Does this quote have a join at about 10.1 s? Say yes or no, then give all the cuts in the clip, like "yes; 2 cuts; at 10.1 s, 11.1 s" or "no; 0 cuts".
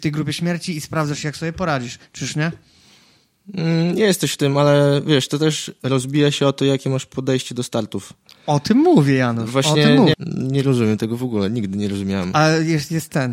yes; 1 cut; at 10.1 s